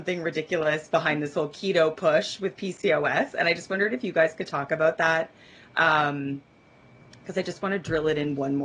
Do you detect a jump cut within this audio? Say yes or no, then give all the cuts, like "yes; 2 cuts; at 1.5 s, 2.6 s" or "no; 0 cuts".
no; 0 cuts